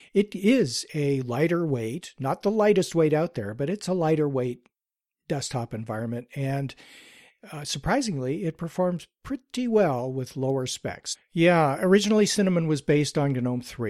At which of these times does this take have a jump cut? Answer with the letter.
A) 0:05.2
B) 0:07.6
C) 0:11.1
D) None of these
C